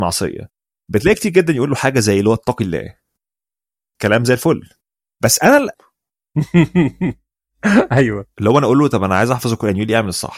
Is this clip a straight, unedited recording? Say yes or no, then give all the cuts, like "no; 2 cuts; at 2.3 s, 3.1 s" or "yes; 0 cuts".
no; 1 cut; at 5.8 s